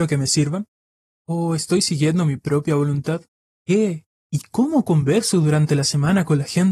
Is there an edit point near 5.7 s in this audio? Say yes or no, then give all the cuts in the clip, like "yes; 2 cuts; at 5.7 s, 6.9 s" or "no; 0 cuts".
no; 2 cuts; at 1.1 s, 3.6 s